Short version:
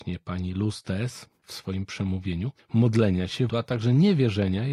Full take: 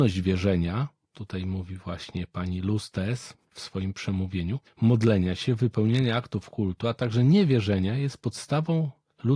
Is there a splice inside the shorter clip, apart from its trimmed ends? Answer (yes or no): yes